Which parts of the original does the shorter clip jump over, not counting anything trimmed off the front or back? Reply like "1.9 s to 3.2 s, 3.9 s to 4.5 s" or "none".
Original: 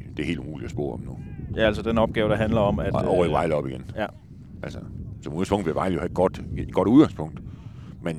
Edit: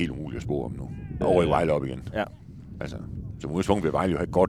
1.5 s to 3.0 s